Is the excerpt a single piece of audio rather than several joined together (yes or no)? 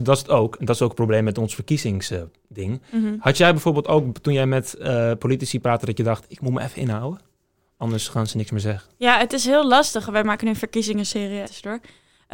no